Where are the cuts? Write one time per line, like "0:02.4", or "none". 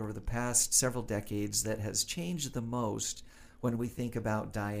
none